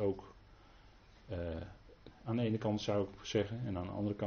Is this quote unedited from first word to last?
no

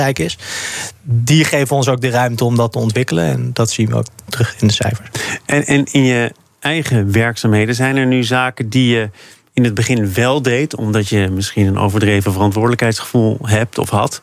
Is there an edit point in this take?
no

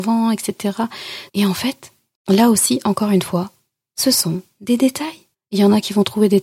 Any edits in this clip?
yes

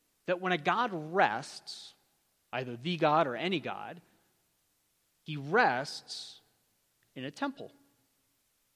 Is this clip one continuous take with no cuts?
yes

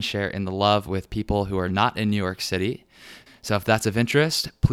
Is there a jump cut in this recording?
yes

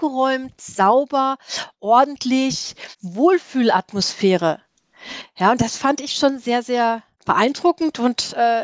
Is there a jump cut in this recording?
no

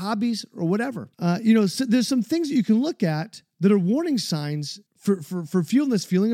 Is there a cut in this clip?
yes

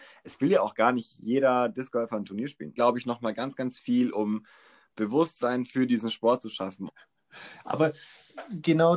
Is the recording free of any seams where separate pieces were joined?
no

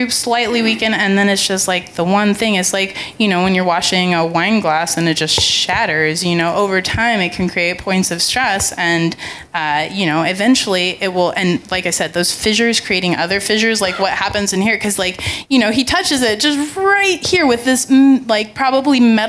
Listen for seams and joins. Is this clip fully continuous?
yes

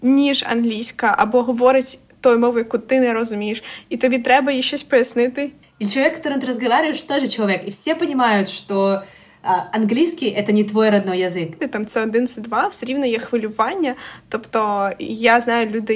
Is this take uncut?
no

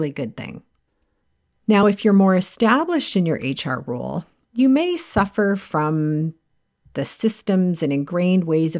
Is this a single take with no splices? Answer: yes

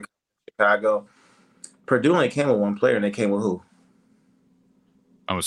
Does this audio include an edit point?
no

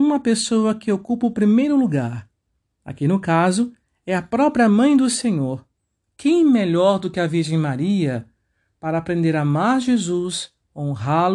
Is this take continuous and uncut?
yes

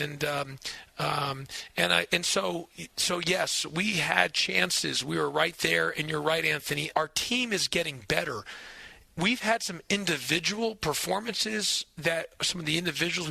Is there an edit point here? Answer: yes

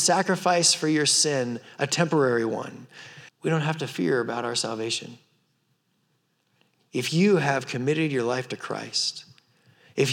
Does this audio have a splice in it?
yes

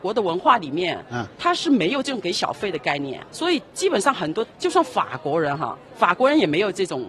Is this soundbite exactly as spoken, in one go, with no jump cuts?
no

